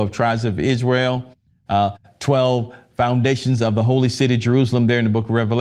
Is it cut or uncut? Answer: uncut